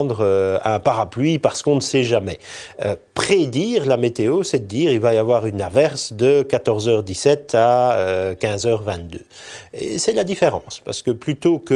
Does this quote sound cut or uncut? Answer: uncut